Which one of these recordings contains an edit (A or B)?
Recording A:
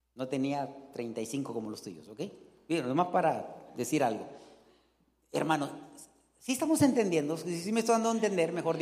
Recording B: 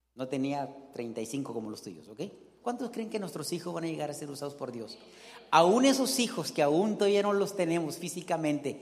B